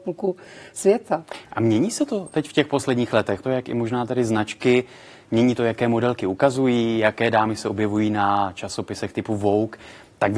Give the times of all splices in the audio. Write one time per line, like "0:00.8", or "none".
0:03.4

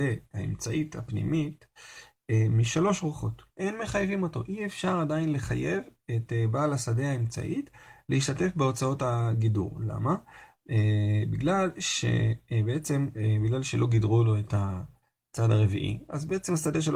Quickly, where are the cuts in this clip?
0:03.5

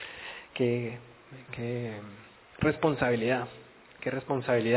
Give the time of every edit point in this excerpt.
none

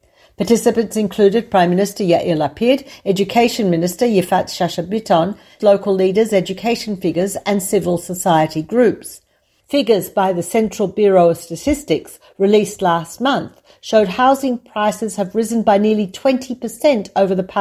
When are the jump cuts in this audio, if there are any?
0:05.6
0:09.6

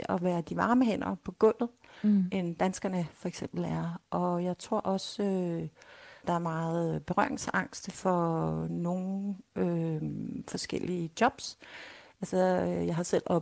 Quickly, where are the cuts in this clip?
0:06.2

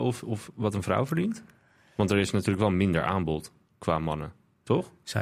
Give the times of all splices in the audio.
none

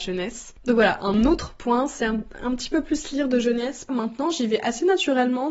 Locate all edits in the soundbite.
0:03.9

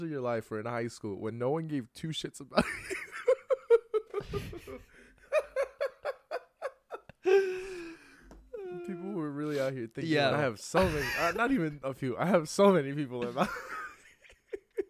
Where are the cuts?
0:10.3

